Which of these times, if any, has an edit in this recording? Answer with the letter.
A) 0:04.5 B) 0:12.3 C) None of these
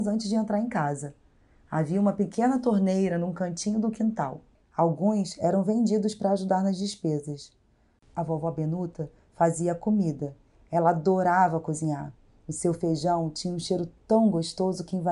A